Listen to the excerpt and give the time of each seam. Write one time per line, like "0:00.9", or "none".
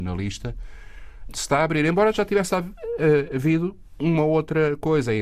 0:01.3